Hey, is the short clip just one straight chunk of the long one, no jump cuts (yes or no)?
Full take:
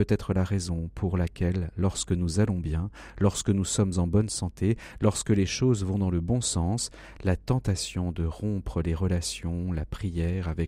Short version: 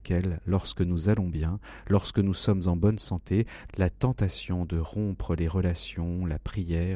no